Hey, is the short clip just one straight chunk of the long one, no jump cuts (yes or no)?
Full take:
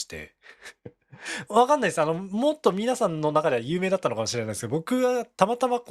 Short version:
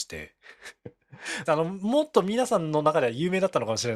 no